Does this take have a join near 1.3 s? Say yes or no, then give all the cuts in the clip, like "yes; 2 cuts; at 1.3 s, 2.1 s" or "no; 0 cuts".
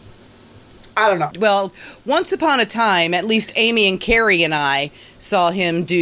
yes; 1 cut; at 1.3 s